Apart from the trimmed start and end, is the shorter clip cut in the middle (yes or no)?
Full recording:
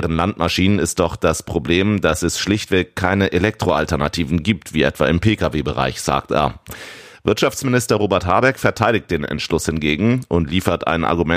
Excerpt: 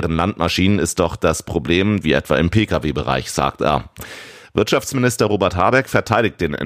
yes